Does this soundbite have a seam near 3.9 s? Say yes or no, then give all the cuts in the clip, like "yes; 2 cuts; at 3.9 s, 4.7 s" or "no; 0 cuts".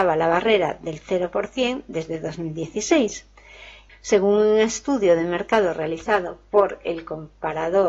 yes; 1 cut; at 3.9 s